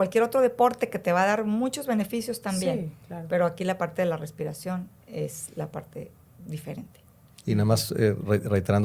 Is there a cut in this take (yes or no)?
no